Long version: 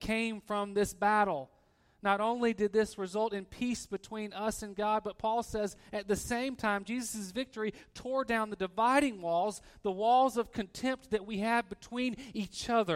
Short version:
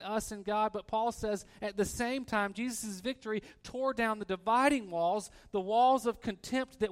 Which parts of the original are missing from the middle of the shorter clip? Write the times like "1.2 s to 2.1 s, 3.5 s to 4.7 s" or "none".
none